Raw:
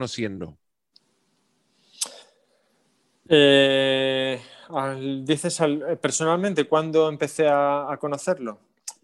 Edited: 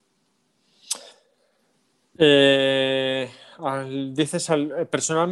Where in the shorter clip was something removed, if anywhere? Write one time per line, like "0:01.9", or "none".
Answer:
none